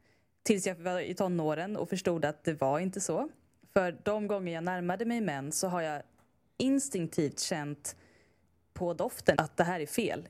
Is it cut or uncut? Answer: cut